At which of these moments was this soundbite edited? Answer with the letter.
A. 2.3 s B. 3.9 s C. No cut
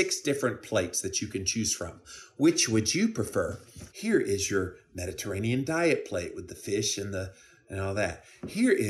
B